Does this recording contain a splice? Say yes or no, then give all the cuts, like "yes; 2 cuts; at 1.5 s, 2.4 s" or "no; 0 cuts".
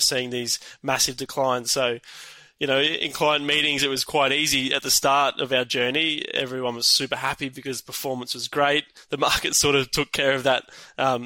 no; 0 cuts